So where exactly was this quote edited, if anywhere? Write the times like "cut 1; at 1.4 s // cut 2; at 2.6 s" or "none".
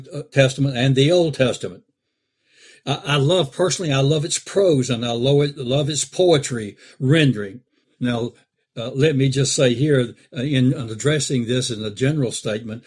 cut 1; at 7.8 s